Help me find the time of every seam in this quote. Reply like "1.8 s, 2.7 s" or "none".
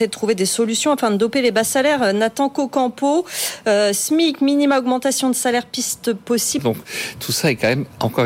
6.6 s